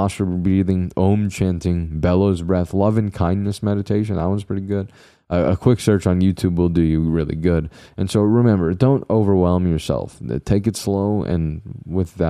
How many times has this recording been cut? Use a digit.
0